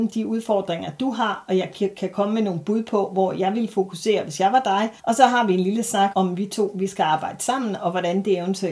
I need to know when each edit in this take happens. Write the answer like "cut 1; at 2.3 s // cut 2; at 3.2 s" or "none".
cut 1; at 5.0 s // cut 2; at 6.1 s